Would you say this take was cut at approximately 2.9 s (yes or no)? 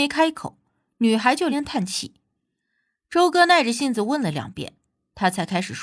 no